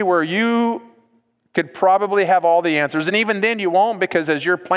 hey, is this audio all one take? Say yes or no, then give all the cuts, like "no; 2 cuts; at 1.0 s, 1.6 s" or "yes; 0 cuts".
yes; 0 cuts